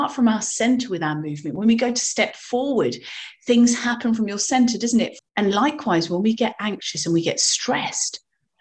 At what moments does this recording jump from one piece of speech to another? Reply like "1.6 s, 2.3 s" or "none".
5.2 s